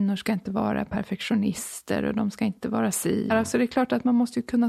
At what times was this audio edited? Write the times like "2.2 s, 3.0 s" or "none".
3.3 s